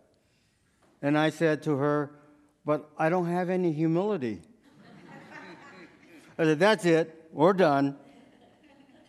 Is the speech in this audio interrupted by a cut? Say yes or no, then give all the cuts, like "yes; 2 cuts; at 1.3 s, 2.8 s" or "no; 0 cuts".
yes; 1 cut; at 4.6 s